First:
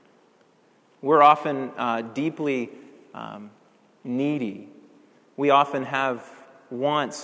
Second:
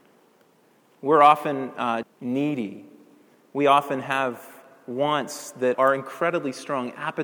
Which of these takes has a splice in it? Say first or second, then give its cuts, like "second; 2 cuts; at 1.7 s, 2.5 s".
second; 2 cuts; at 2.0 s, 5.7 s